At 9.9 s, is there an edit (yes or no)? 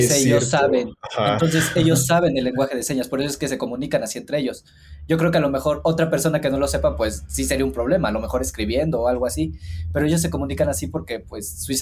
no